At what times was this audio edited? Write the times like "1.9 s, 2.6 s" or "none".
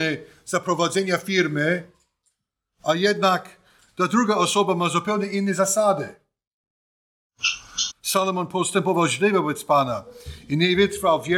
7.9 s